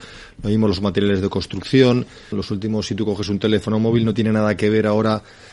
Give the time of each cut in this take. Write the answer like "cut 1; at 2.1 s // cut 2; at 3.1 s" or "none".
cut 1; at 2.3 s